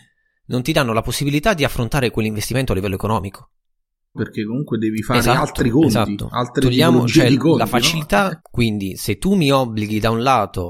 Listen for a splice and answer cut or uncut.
cut